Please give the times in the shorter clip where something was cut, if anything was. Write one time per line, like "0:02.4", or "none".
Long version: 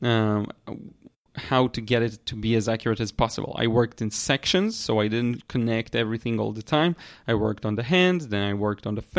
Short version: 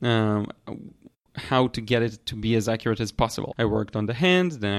0:03.5